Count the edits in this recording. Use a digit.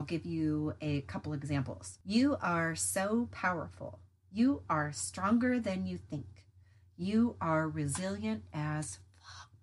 0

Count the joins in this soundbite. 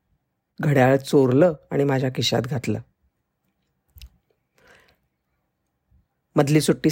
0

